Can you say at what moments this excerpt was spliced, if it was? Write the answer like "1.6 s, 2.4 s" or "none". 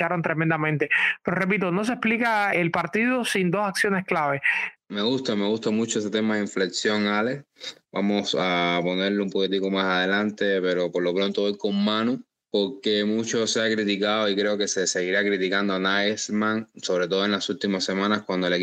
2.5 s, 4.8 s